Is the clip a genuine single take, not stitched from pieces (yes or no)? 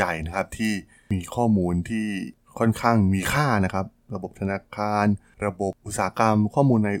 yes